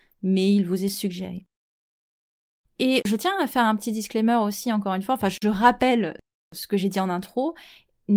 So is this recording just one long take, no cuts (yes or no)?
yes